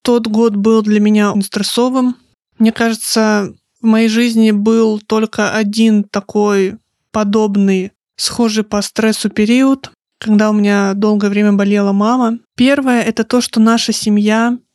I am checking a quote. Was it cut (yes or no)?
yes